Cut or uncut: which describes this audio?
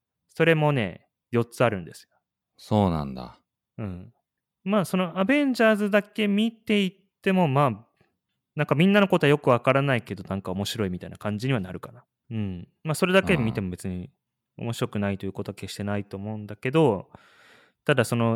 cut